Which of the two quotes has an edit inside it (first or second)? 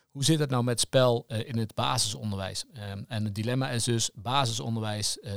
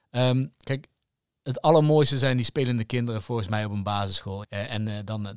second